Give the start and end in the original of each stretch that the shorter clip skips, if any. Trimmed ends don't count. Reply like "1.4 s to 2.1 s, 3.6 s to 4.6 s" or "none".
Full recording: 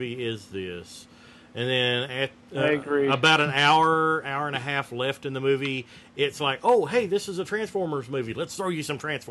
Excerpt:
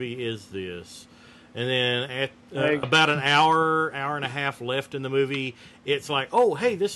2.8 s to 3.1 s